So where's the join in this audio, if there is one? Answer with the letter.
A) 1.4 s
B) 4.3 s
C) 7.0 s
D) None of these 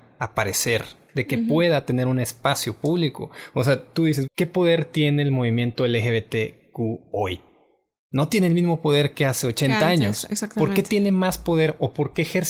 B